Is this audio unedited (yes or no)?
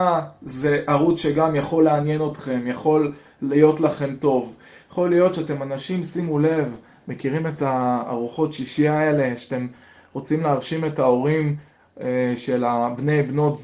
yes